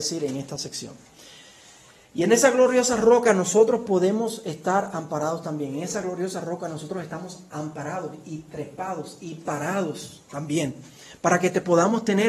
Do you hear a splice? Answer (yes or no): no